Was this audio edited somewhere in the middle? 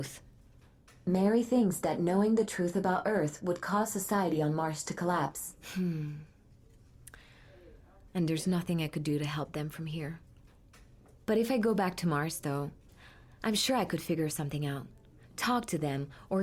yes; 1 cut; at 8.1 s

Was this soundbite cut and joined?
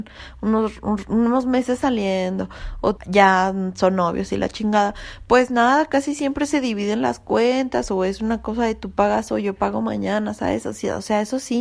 yes; 1 cut; at 3.0 s

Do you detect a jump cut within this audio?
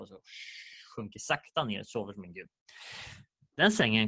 no; 0 cuts

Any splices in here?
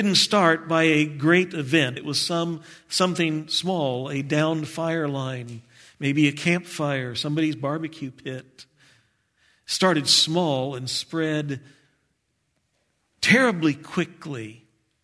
yes; 1 cut; at 2.0 s

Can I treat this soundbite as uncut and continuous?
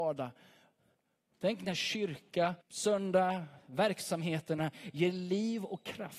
no; 2 cuts; at 1.3 s, 2.6 s

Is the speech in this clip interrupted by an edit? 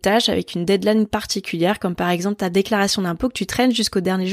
no; 0 cuts

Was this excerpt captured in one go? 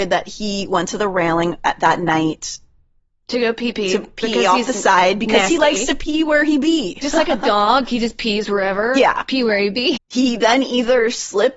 no; 1 cut; at 10.0 s

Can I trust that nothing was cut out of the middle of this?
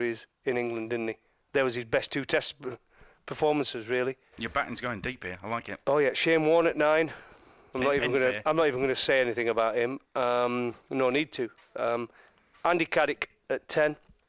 no; 1 cut; at 4.3 s

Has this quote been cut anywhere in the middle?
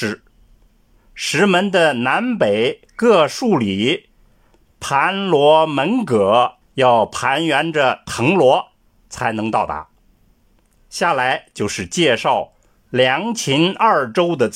yes; 3 cuts; at 4.7 s, 6.6 s, 10.7 s

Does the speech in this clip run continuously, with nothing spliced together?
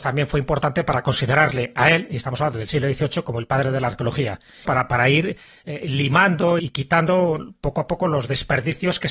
no; 2 cuts; at 4.7 s, 6.6 s

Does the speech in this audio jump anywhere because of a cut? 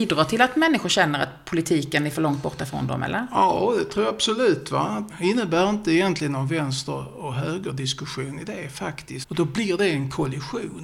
yes; 2 cuts; at 5.1 s, 9.2 s

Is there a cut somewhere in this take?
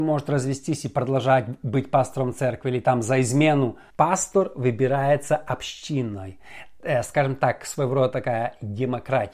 yes; 1 cut; at 3.9 s

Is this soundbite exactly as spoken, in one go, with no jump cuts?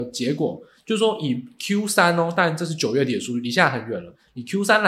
yes; 0 cuts

